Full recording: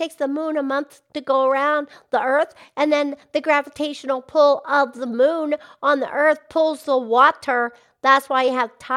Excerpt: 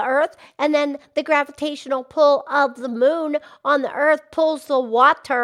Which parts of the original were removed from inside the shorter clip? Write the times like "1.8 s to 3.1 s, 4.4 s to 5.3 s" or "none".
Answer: none